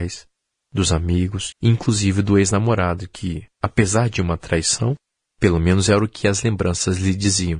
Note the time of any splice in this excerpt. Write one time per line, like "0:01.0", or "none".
0:01.5
0:03.5
0:05.2